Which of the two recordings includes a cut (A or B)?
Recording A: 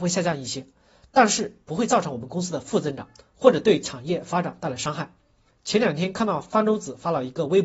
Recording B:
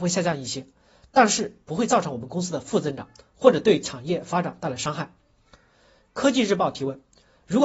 A